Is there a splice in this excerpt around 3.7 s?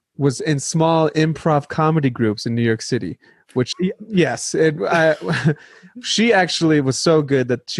yes; 1 cut; at 3.7 s

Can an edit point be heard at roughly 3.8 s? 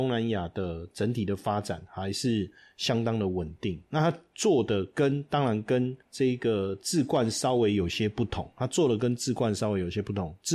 no; 0 cuts

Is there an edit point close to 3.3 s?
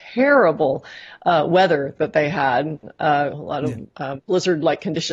yes; 1 cut; at 3.3 s

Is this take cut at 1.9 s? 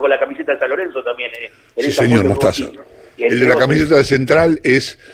no; 1 cut; at 3.2 s

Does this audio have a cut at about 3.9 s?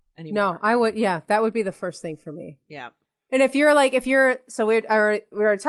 no; 0 cuts

